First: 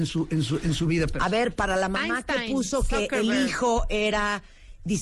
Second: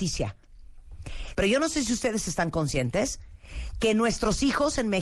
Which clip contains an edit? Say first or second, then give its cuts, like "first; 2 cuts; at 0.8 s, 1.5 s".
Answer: second; 1 cut; at 1.3 s